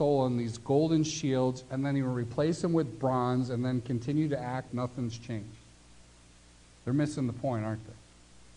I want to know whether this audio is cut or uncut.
cut